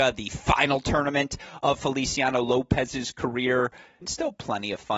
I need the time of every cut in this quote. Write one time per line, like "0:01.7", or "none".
0:04.0

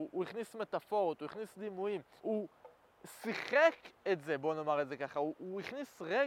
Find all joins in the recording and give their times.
0:02.2

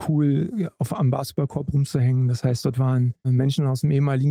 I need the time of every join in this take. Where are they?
0:03.2

